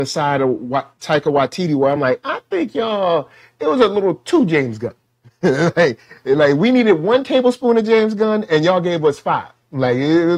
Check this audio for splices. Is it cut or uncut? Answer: uncut